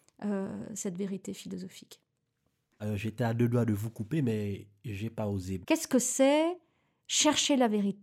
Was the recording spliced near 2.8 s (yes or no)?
yes